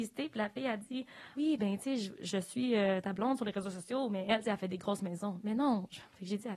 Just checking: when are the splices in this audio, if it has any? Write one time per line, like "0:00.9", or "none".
0:01.4